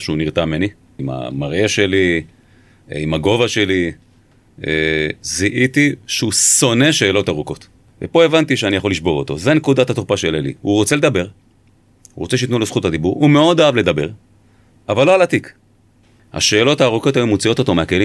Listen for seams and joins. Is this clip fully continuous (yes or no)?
no